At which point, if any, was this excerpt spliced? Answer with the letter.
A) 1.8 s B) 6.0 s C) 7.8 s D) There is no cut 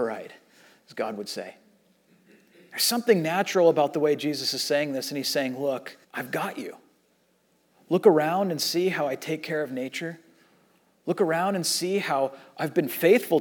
B